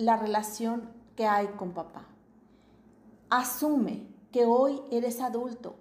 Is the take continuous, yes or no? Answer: no